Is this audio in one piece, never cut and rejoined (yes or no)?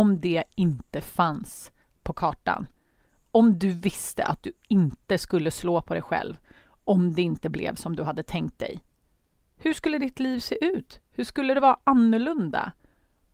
yes